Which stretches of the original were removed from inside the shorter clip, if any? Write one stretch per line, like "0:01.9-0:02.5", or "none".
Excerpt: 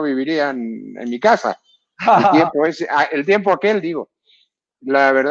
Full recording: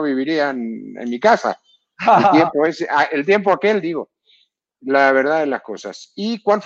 none

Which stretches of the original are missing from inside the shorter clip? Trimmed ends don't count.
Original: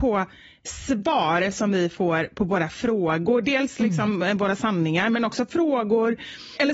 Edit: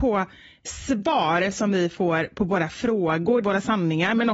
0:03.4-0:04.4

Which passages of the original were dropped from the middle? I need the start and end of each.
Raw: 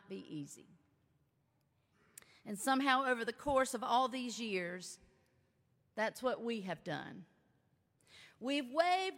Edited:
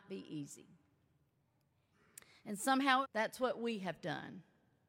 0:03.0-0:05.8

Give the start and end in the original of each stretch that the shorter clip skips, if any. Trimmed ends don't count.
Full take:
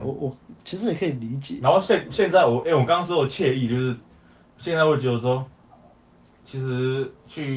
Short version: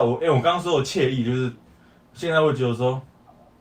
none

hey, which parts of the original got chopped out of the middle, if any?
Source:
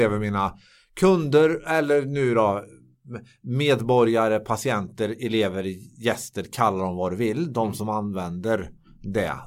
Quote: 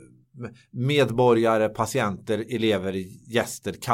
none

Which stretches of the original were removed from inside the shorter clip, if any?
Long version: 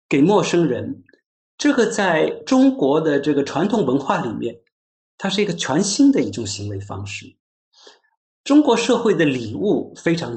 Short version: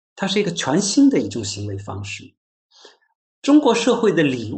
none

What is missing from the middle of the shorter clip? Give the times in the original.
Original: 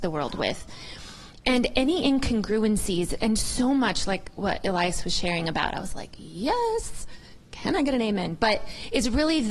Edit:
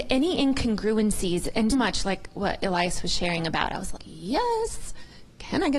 0:03.4-0:03.7
0:06.0-0:06.1

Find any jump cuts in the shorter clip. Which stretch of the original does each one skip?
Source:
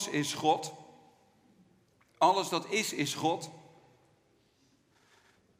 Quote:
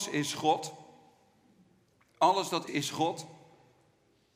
0:02.7-0:02.9

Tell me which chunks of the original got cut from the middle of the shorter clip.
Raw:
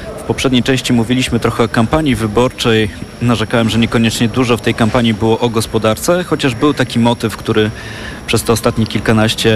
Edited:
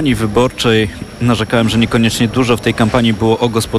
none

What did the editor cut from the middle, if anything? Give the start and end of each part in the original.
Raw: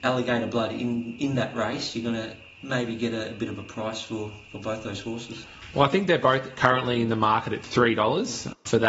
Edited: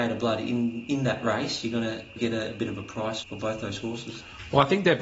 0:02.5-0:03.0
0:04.0-0:04.4

